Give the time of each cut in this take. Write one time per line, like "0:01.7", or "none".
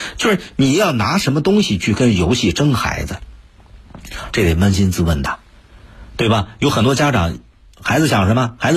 0:04.3